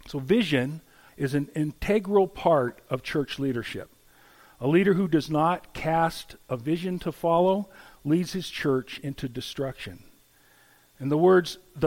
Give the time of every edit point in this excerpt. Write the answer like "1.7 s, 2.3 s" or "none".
1.1 s